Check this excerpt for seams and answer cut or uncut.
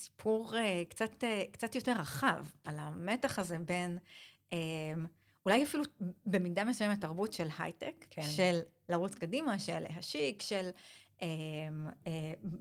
uncut